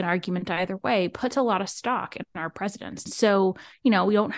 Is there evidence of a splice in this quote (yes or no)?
yes